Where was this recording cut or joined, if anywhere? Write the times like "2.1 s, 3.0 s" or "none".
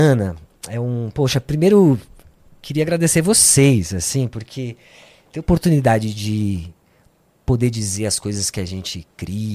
none